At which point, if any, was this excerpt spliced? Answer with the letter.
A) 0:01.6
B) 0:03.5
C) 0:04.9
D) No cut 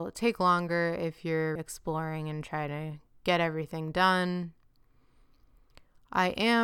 A